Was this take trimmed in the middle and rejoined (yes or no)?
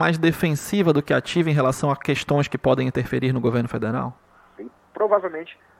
yes